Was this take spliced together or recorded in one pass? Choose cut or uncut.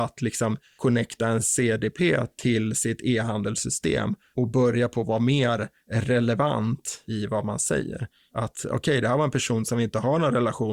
uncut